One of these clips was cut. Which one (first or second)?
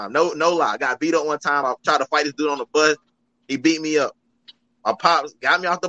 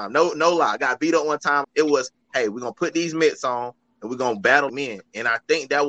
second